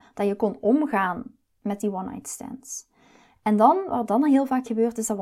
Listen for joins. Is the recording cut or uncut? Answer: uncut